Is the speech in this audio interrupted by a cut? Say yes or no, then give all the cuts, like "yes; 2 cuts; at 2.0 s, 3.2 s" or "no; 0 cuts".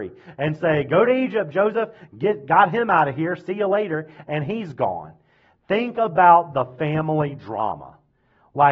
no; 0 cuts